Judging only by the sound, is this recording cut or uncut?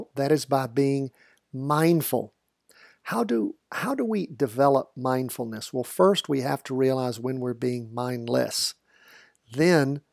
uncut